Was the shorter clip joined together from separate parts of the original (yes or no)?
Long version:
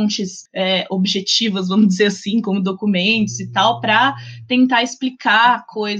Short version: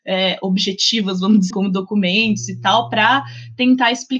yes